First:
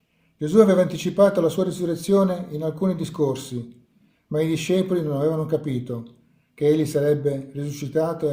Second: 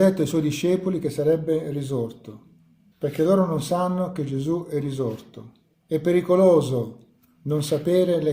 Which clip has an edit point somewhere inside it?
second; 2 cuts; at 2.9 s, 5.8 s

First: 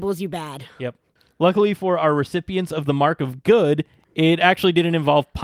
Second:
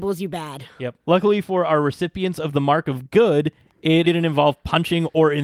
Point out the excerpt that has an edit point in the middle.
second; 2 cuts; at 1.0 s, 4.0 s

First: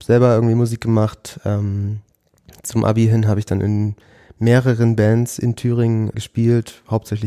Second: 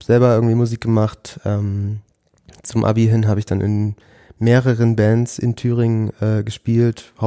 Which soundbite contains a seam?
first; 1 cut; at 6.1 s

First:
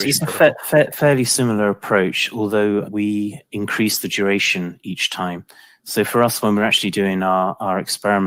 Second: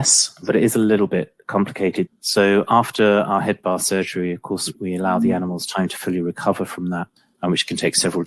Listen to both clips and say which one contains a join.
second; 1 cut; at 2.1 s

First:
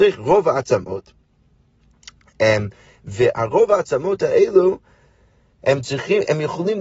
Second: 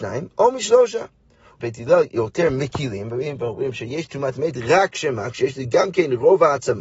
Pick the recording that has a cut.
second; 1 cut; at 1.6 s

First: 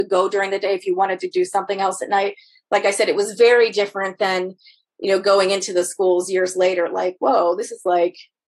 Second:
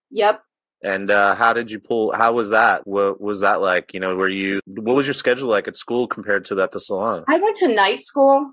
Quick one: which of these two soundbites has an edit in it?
second; 2 cuts; at 2.8 s, 4.6 s

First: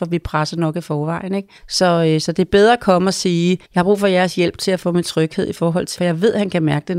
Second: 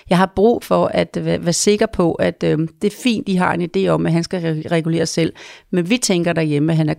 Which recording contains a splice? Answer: first; 3 cuts; at 1.6 s, 3.6 s, 6.0 s

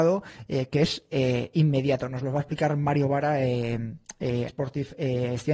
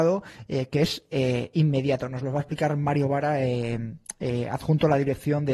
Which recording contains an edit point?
first; 1 cut; at 4.5 s

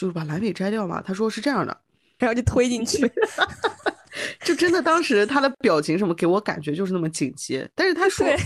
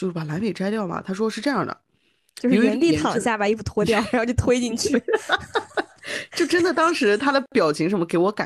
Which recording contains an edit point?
first; 1 cut; at 2.2 s

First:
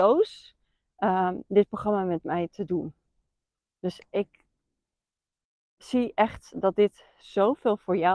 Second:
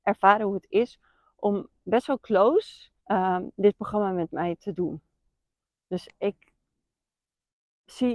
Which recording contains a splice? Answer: second; 1 cut; at 3.0 s

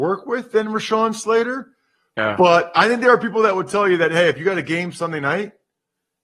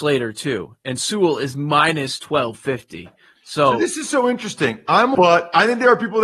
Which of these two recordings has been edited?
second; 1 cut; at 5.1 s

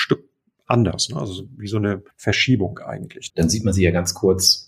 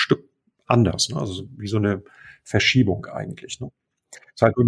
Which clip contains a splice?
first; 2 cuts; at 2.1 s, 3.3 s

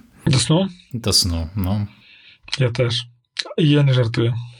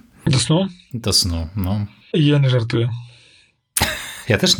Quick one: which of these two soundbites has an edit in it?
second; 1 cut; at 2.1 s

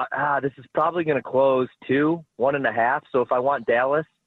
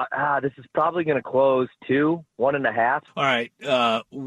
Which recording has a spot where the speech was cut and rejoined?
second; 1 cut; at 3.1 s

